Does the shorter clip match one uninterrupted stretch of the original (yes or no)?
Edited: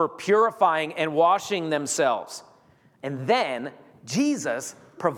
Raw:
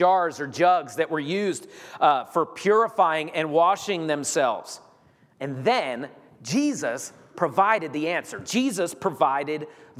yes